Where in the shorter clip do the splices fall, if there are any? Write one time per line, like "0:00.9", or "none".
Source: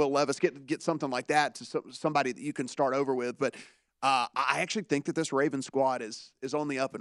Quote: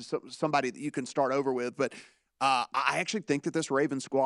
none

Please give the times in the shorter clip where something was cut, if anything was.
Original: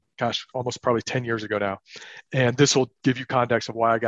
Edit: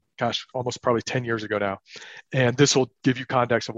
none

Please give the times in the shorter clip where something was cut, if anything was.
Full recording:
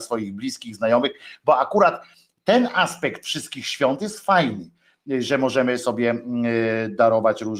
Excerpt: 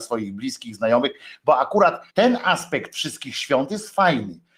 0:02.1

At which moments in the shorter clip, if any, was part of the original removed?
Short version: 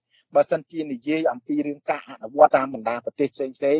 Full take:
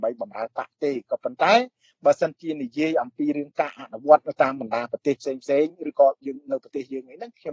0:02.5

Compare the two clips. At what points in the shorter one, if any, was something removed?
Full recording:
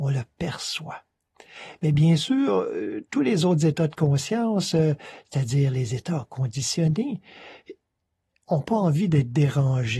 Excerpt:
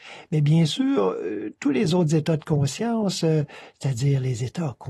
none

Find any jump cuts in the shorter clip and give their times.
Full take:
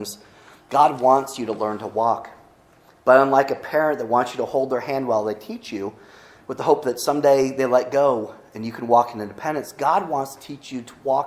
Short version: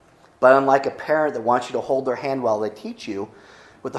none

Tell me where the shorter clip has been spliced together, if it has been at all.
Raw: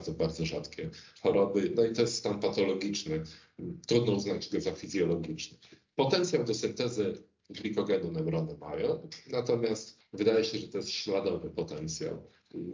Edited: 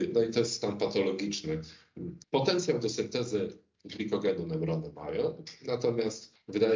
0:02.2

